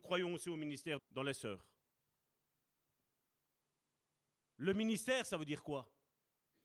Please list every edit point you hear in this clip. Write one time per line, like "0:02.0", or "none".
0:01.0